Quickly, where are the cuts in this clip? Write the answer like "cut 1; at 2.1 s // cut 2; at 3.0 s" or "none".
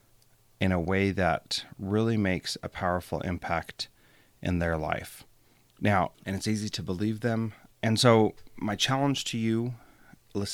cut 1; at 6.1 s // cut 2; at 7.7 s

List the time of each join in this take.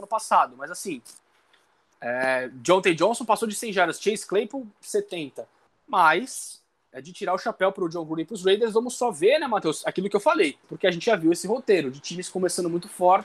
cut 1; at 5.7 s // cut 2; at 10.6 s

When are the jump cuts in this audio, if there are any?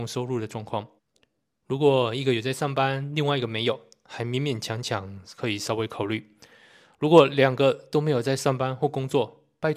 cut 1; at 1.0 s

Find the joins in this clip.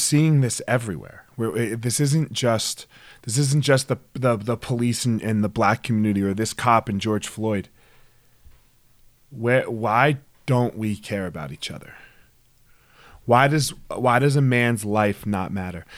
none

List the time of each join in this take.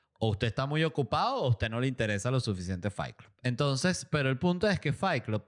none

